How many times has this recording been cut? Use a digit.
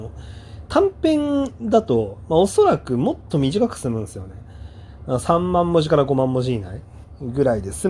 0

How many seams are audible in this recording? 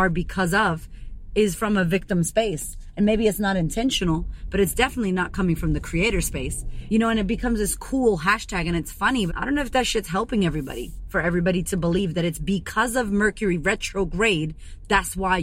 2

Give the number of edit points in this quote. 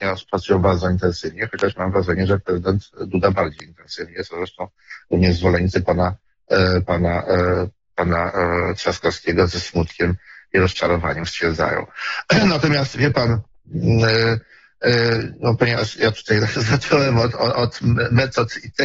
0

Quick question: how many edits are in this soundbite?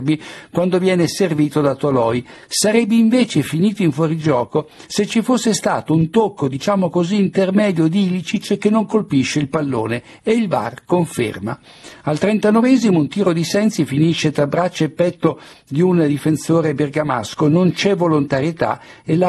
0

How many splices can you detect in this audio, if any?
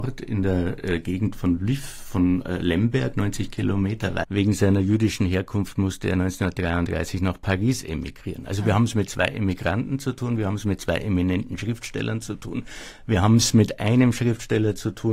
1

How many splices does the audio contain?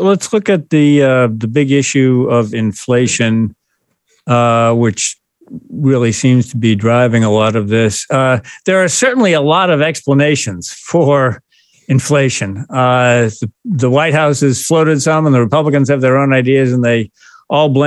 0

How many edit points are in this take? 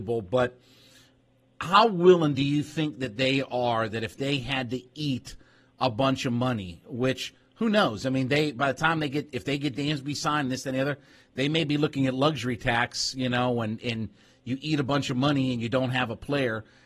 0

